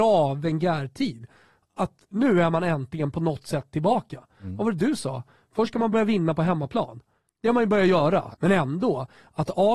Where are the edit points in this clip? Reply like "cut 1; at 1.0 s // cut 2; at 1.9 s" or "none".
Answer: cut 1; at 2.1 s // cut 2; at 8.3 s